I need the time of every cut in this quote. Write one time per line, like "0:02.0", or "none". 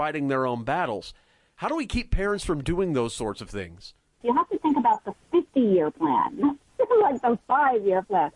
0:04.2